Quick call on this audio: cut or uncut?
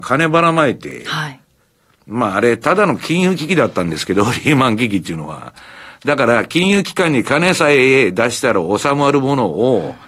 uncut